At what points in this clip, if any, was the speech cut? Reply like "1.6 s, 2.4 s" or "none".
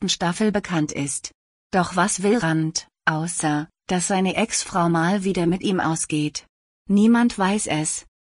none